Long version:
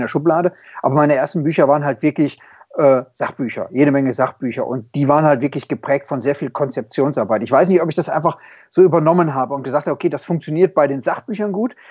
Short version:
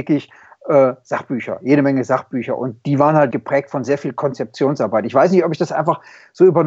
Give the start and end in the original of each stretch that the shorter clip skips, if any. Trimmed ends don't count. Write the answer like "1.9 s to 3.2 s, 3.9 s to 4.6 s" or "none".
5.4 s to 5.7 s